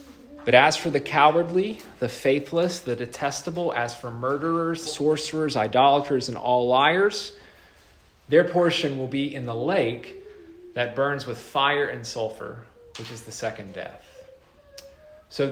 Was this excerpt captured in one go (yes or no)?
no